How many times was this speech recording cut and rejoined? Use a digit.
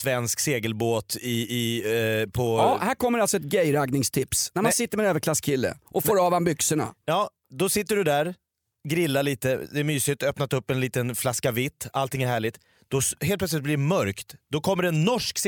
0